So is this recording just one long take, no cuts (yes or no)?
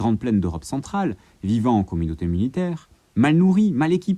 yes